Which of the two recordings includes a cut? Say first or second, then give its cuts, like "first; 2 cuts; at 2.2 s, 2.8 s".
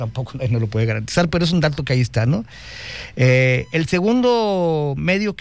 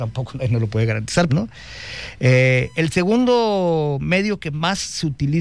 second; 1 cut; at 1.3 s